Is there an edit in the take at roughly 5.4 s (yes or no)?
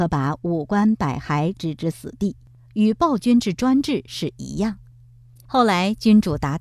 yes